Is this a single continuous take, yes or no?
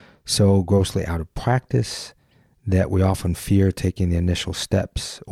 yes